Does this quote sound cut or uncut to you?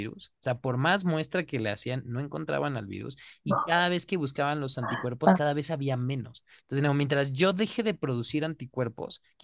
uncut